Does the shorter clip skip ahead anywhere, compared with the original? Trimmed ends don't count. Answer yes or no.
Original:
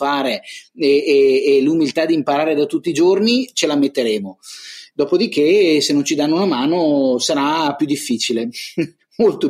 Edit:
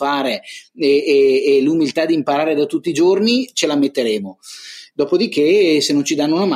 no